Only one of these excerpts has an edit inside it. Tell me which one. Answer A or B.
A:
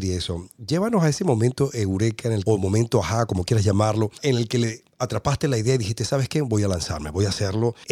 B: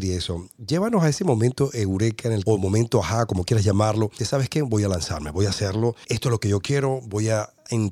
B